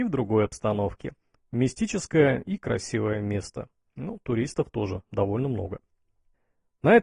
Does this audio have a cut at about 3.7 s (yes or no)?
no